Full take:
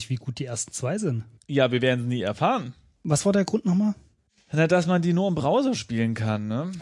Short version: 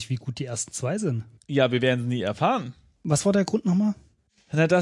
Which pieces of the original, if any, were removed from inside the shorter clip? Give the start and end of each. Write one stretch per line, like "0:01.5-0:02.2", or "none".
none

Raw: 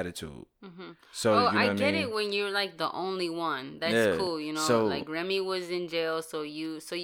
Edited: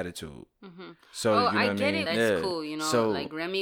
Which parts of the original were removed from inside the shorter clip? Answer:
0:02.0-0:03.8

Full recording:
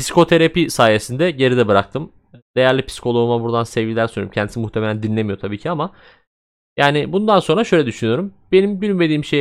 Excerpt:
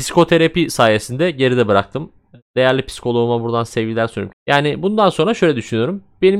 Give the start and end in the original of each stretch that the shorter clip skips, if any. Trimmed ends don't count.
0:04.3-0:06.6

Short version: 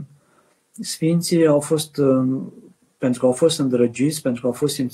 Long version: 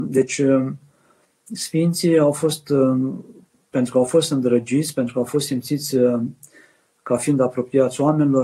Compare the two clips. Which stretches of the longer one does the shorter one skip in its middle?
none

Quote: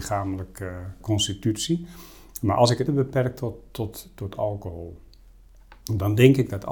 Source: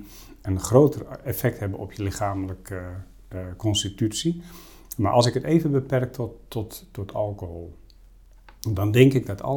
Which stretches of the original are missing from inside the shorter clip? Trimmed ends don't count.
0:03.1-0:03.6
0:05.4-0:05.6

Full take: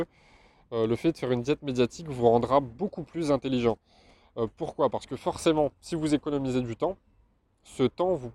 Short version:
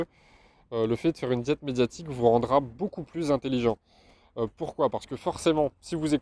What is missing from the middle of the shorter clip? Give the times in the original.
none

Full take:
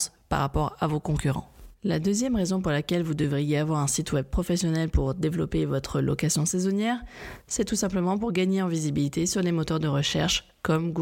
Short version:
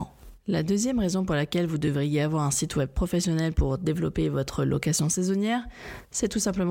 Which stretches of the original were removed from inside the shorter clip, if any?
none

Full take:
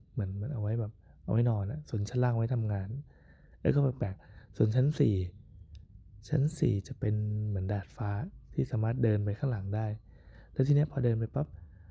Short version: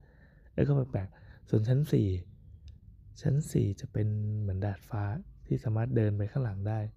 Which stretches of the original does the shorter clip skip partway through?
none

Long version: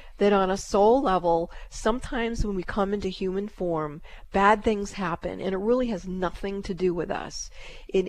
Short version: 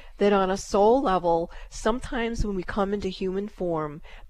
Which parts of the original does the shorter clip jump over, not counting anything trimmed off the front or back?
none

